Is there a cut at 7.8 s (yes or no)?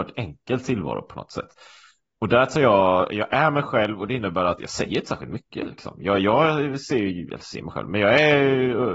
no